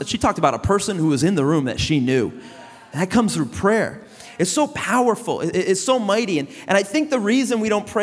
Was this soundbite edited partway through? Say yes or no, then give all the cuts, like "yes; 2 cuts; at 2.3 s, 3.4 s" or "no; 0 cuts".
no; 0 cuts